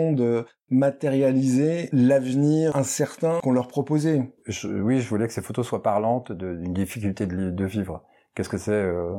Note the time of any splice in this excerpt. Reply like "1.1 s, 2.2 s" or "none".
none